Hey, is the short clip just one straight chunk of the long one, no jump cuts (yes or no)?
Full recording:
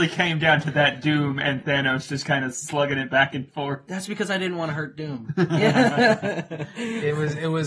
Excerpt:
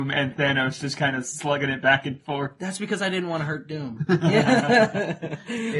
yes